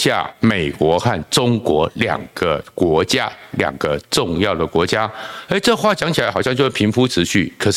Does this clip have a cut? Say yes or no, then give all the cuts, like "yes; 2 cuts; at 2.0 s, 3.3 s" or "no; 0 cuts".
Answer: no; 0 cuts